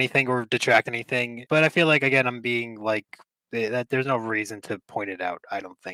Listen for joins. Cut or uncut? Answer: cut